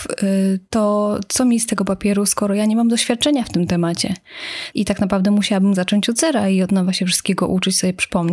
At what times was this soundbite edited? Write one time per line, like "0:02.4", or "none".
0:04.7